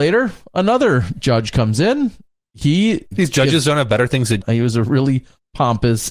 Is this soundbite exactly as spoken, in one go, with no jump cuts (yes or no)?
no